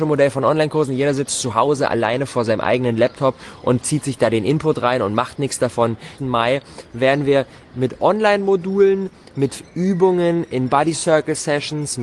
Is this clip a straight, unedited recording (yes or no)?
no